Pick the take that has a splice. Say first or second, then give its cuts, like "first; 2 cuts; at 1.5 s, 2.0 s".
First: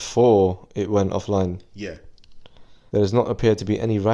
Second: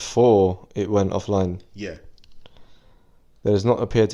first; 1 cut; at 2.9 s